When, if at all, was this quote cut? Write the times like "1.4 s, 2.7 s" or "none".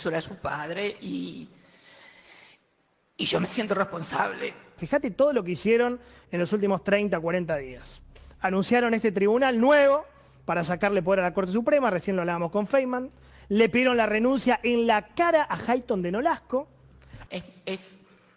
4.8 s, 17.3 s